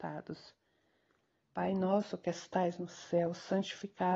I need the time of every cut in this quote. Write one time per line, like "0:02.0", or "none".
0:01.4